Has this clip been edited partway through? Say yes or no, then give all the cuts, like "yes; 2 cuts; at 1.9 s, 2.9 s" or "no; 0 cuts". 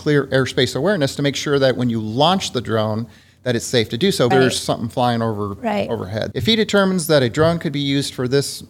yes; 2 cuts; at 4.3 s, 6.3 s